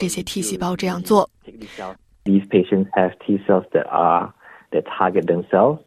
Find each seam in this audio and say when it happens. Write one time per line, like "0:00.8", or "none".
0:02.0